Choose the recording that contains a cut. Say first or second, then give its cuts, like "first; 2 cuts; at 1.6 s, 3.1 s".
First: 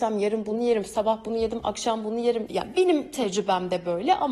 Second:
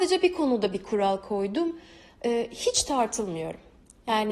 first; 1 cut; at 2.5 s